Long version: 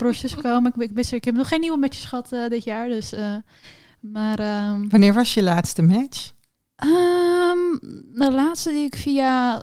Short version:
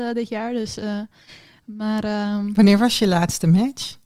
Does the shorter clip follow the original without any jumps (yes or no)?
yes